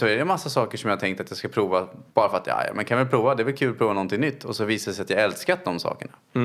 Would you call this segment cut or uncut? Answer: cut